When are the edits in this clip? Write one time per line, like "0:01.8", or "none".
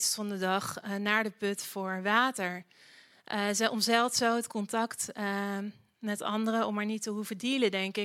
none